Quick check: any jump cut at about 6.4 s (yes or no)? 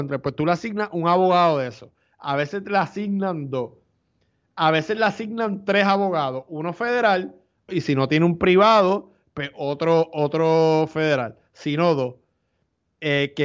no